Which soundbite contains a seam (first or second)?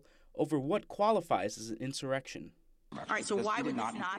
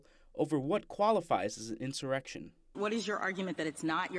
second